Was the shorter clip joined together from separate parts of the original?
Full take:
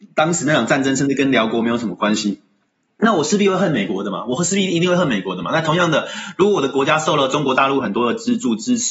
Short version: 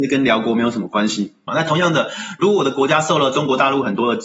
yes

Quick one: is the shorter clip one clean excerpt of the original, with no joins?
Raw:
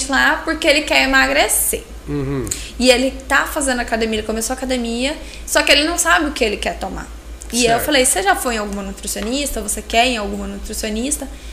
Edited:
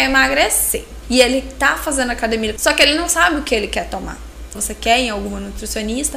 no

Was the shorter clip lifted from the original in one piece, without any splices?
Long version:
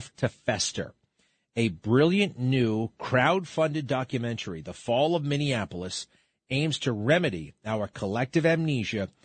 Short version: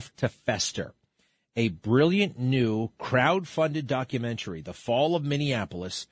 yes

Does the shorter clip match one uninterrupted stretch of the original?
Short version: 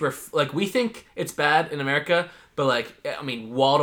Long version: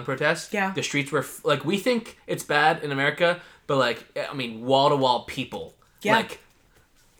yes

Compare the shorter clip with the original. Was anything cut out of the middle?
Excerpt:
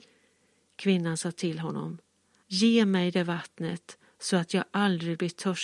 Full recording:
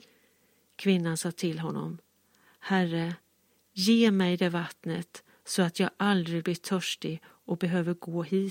yes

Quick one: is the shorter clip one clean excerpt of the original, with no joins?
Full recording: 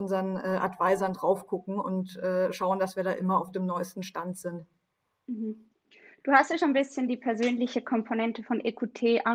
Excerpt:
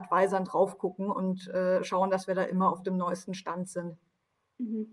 yes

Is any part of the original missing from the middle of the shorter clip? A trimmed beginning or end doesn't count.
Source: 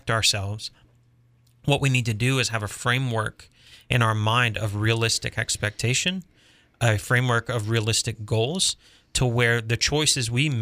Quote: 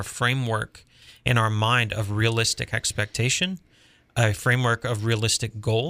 no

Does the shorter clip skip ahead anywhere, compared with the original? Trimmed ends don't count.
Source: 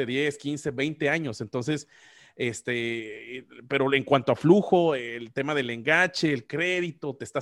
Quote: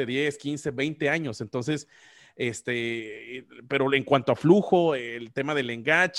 no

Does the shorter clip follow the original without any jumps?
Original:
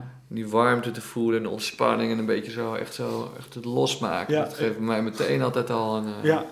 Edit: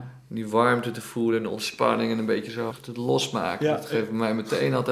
no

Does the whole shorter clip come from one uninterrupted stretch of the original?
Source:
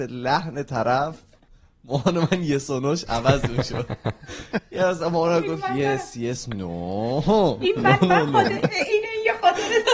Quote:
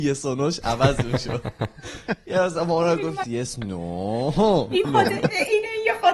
no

